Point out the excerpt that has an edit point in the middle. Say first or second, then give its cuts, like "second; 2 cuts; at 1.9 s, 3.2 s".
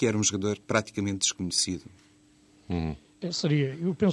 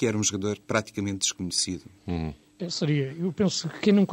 second; 1 cut; at 2.0 s